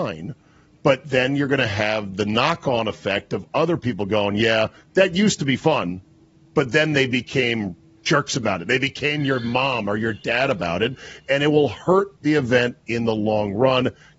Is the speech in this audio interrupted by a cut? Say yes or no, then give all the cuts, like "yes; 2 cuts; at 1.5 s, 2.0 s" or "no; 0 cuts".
no; 0 cuts